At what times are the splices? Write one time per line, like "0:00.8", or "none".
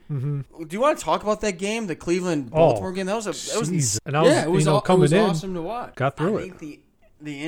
0:04.0
0:05.9